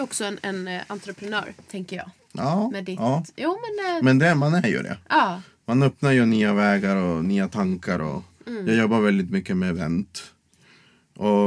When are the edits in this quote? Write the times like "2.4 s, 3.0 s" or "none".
none